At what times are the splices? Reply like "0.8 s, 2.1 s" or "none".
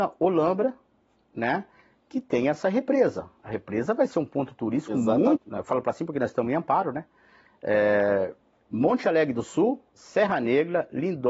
5.4 s